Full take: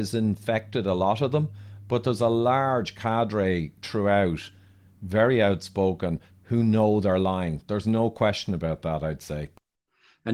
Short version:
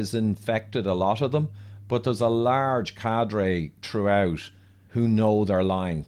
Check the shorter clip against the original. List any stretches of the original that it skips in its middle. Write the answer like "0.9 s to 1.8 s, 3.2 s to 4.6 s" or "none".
4.9 s to 6.4 s